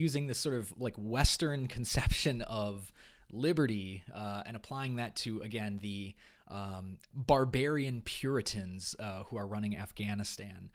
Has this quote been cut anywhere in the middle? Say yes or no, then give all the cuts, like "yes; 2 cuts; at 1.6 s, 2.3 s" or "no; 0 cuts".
no; 0 cuts